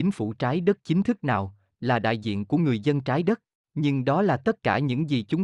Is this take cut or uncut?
cut